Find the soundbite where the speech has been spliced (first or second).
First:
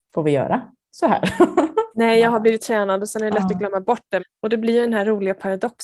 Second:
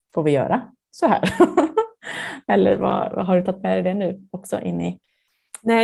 first